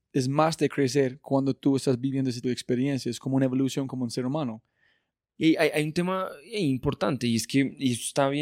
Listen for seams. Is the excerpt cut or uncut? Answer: cut